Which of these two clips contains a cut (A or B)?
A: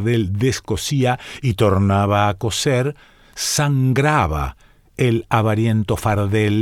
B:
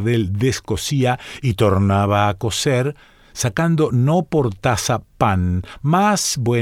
B